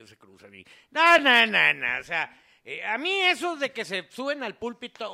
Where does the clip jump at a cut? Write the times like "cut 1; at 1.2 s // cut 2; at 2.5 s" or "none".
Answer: none